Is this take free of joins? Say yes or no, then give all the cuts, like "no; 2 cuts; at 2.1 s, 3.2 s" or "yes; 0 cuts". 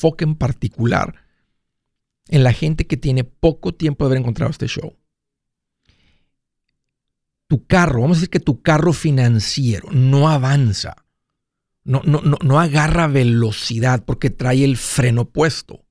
yes; 0 cuts